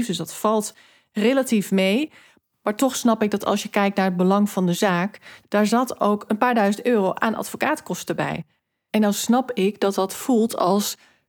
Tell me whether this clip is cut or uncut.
cut